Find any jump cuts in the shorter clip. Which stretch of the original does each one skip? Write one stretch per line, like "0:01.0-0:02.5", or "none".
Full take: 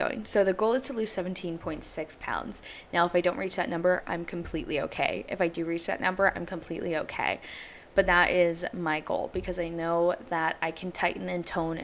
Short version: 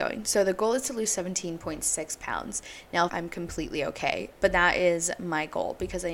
0:03.1-0:04.0
0:05.3-0:07.8